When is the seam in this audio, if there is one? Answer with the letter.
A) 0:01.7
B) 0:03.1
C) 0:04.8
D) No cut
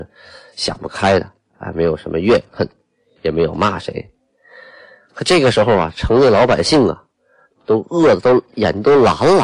D